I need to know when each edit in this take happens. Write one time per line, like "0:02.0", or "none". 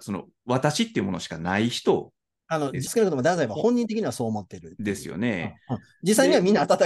0:02.9

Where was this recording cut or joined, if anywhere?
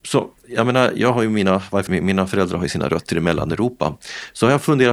0:01.9

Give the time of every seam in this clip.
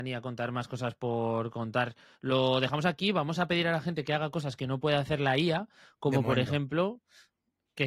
none

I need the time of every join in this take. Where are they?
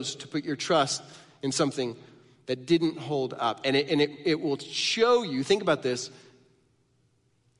none

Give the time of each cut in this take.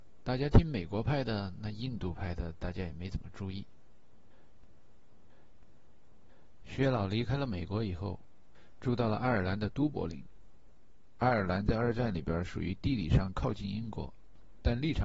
none

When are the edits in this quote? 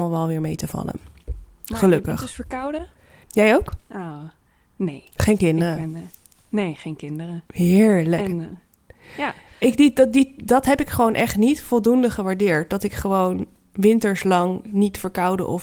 0:03.2

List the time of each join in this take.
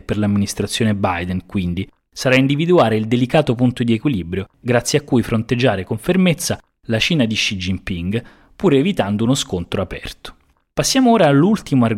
none

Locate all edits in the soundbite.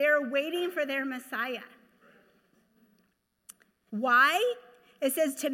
0:03.9

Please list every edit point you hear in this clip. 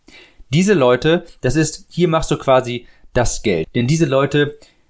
0:03.6

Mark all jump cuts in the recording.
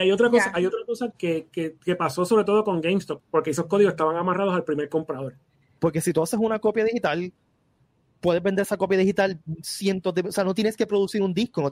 0:01.1
0:03.2
0:05.8

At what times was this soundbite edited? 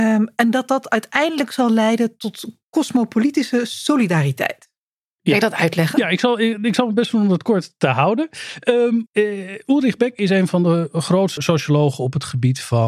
0:09.1
0:11.4

